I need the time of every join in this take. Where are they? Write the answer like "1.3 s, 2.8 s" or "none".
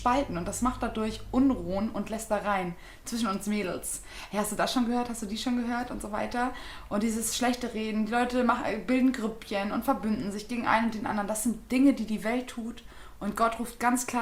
none